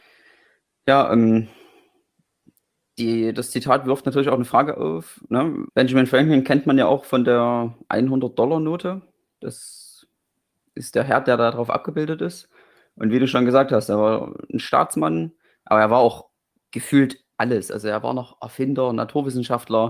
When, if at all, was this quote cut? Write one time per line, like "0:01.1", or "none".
0:05.7

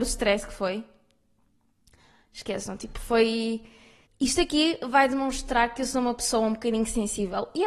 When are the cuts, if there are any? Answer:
0:04.0

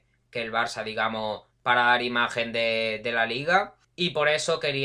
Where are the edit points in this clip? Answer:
0:03.8

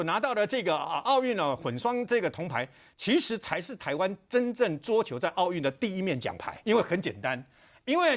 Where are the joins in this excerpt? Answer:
0:06.6

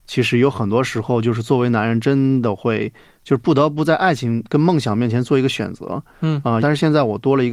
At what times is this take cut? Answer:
0:06.6

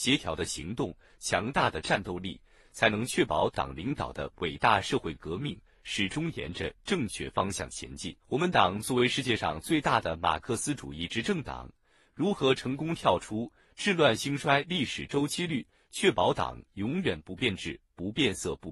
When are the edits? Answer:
0:08.2

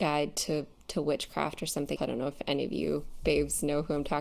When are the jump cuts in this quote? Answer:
0:02.0

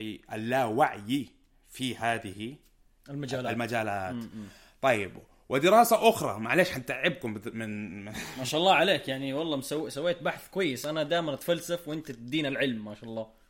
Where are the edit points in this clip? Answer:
none

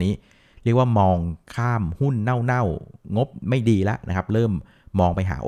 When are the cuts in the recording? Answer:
none

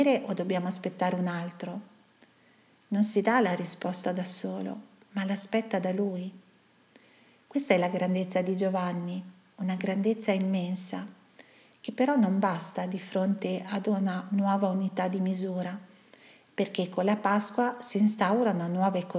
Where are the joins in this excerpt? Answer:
none

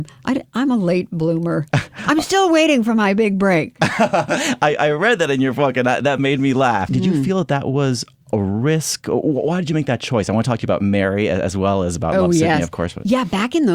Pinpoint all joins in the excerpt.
0:06.9

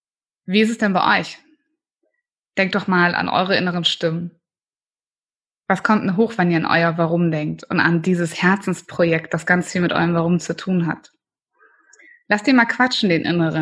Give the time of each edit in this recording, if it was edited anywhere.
none

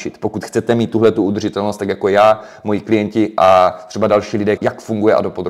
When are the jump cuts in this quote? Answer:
0:04.6

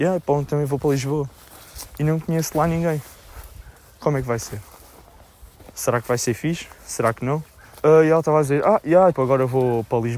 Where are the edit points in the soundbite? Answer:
0:07.8
0:09.1

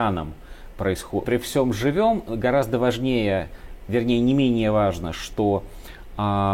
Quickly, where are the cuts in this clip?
0:01.2

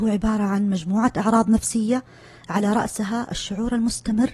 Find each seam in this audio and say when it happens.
none

